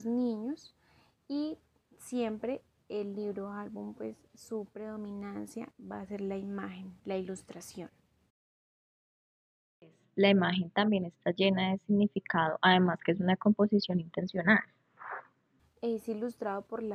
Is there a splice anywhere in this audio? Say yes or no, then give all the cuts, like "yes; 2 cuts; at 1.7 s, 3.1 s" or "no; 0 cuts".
yes; 1 cut; at 15.6 s